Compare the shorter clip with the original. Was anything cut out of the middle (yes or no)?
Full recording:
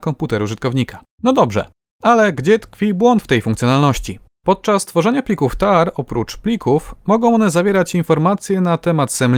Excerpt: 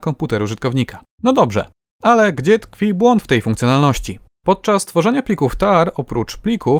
no